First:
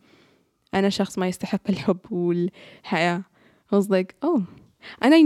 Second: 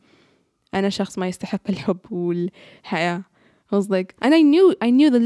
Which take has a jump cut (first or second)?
second